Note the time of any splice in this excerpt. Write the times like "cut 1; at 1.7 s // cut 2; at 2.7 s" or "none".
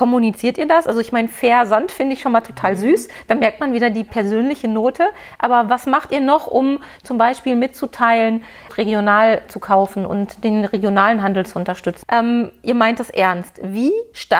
cut 1; at 8.7 s // cut 2; at 12.0 s